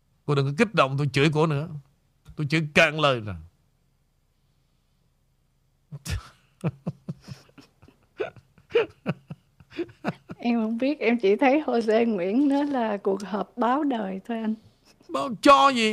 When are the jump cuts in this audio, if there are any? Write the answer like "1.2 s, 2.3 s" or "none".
none